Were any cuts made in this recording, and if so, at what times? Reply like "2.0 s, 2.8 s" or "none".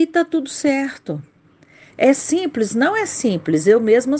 none